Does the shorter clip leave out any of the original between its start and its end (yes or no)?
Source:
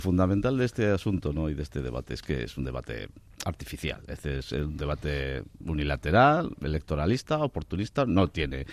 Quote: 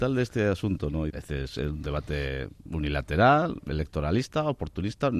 yes